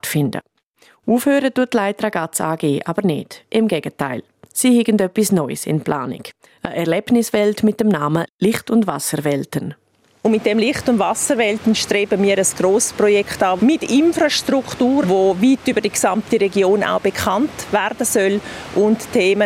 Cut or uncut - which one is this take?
cut